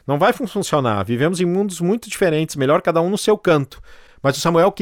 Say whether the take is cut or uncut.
uncut